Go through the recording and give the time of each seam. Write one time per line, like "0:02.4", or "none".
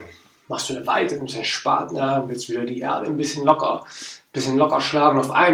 none